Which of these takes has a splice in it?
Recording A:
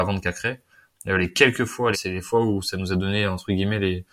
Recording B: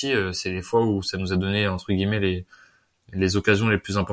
A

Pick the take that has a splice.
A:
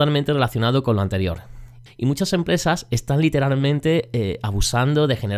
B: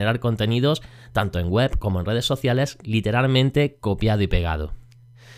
A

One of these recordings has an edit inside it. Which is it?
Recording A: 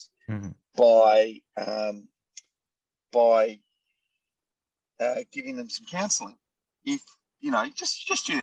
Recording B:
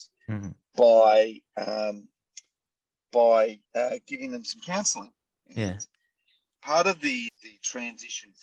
B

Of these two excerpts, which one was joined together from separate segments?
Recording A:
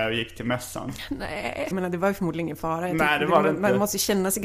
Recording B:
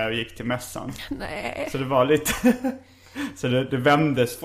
A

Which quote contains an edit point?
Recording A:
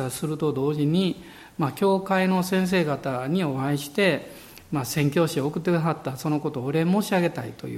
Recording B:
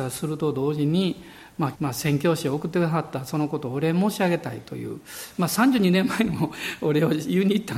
B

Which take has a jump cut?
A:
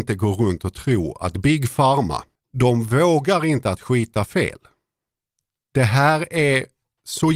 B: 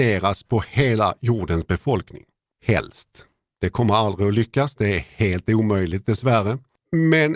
A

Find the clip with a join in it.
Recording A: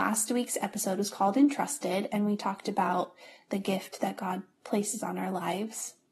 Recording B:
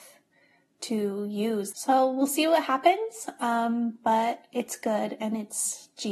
B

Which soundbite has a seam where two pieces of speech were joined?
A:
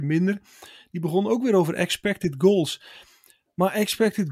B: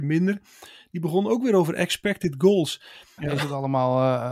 B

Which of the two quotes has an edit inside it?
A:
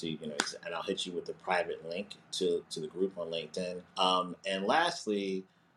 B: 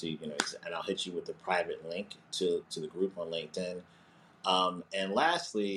A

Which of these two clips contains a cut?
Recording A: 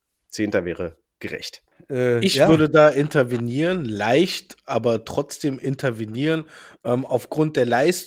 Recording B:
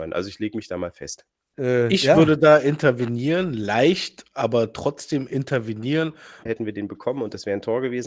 B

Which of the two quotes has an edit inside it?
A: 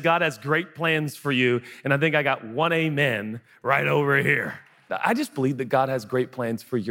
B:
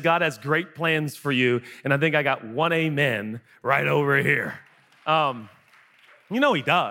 A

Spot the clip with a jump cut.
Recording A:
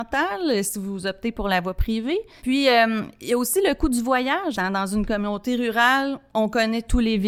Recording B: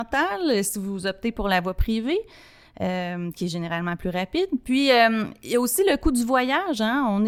A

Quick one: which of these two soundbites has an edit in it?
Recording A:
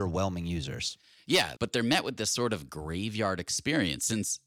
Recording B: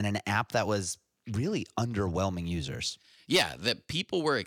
A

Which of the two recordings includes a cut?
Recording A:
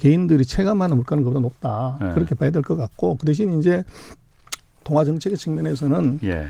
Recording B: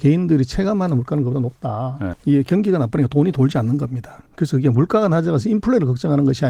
B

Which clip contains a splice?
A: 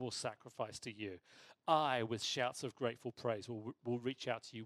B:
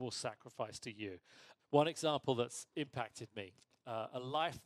B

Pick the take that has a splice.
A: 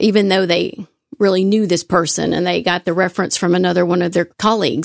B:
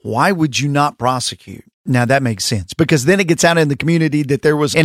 B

